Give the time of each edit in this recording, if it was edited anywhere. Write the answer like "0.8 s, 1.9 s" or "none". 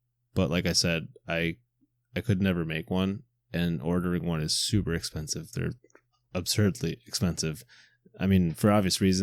none